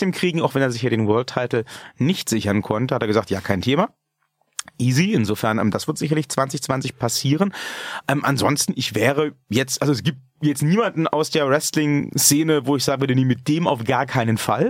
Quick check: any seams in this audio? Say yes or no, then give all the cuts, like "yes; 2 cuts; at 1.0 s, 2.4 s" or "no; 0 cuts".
no; 0 cuts